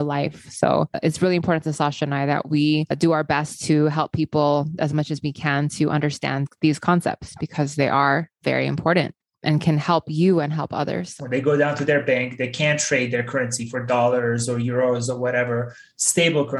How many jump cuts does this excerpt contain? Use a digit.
1